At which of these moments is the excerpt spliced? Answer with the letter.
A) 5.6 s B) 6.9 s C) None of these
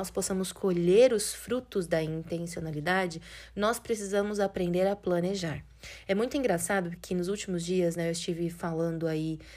B